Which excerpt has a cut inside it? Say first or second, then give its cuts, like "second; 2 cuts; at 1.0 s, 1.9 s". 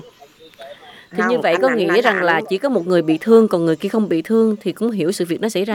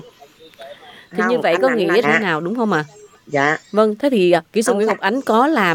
second; 1 cut; at 2.0 s